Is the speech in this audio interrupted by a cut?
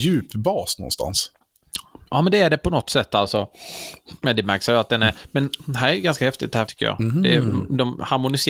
yes; 1 cut; at 6.7 s

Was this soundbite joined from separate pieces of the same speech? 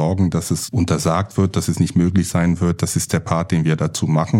no; 0 cuts

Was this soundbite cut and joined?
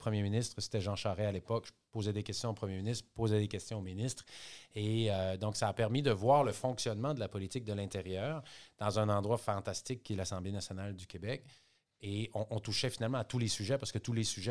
no; 0 cuts

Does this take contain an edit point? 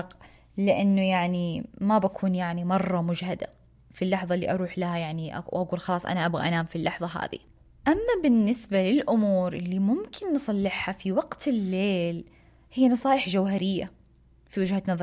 no; 0 cuts

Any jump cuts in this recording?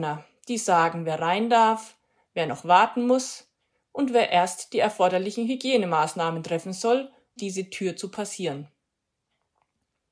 yes; 1 cut; at 7.4 s

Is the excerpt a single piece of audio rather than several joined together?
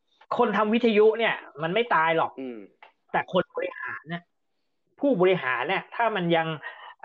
yes; 0 cuts

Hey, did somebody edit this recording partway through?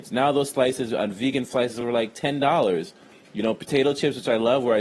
no; 0 cuts

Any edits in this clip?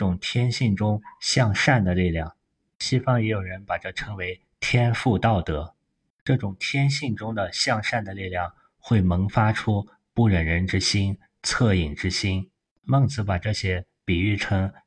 no; 0 cuts

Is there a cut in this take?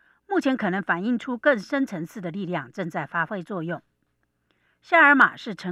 no; 0 cuts

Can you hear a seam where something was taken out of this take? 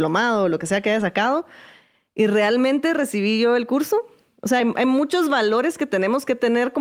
no; 0 cuts

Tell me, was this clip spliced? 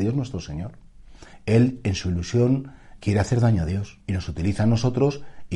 yes; 3 cuts; at 1.3 s, 3.0 s, 4.0 s

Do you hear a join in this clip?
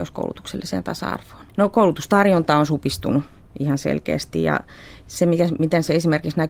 yes; 1 cut; at 1.5 s

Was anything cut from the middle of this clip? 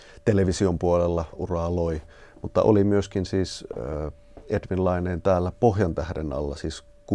yes; 1 cut; at 1.3 s

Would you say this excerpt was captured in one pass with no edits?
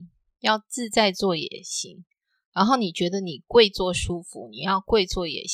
yes; 0 cuts

